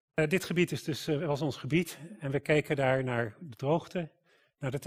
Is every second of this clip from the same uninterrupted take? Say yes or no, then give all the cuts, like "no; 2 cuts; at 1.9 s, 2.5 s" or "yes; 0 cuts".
yes; 0 cuts